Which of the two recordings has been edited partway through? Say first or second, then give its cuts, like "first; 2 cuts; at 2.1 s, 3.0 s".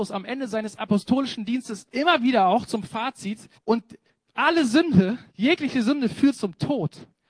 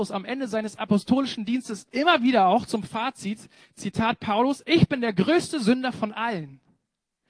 first; 2 cuts; at 3.5 s, 5.3 s